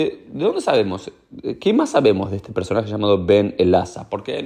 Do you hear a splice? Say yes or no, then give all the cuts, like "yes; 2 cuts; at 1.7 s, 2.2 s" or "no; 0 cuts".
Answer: no; 0 cuts